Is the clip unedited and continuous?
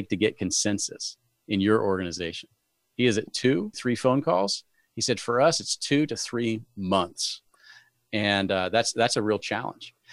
no; 2 cuts; at 3.7 s, 7.9 s

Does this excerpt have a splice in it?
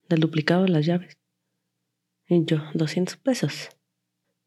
no; 0 cuts

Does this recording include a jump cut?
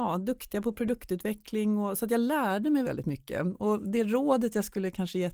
yes; 1 cut; at 2.8 s

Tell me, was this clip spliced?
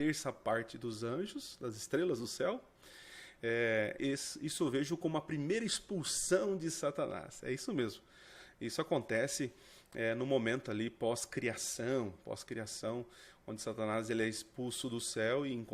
yes; 1 cut; at 4.0 s

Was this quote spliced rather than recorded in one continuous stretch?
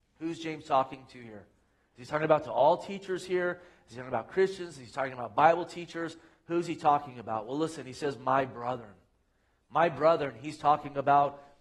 no; 0 cuts

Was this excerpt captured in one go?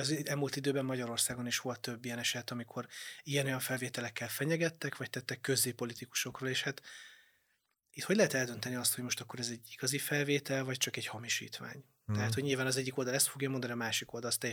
yes; 0 cuts

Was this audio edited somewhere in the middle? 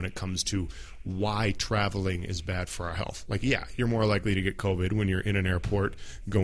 no; 0 cuts

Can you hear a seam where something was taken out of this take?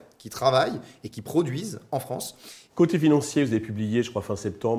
yes; 1 cut; at 2.7 s

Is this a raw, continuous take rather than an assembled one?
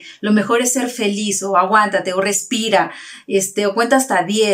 yes; 0 cuts

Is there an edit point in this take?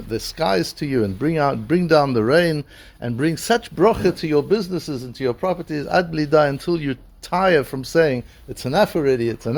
no; 0 cuts

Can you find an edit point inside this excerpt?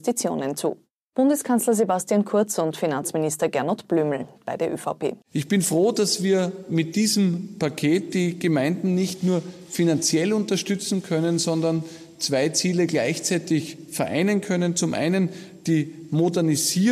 yes; 1 cut; at 5.2 s

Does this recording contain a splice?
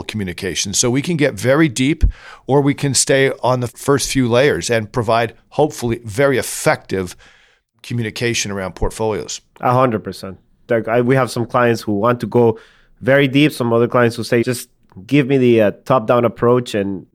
yes; 2 cuts; at 10.7 s, 14.4 s

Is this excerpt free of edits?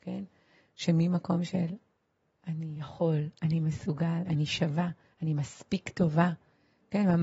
no; 1 cut; at 4.3 s

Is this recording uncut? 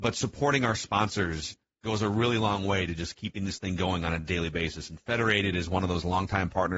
yes; 0 cuts

